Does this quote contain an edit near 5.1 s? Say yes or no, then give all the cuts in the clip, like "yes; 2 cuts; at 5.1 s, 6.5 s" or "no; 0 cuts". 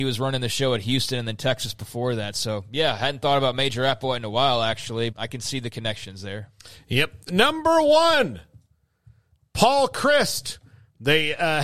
yes; 1 cut; at 5.1 s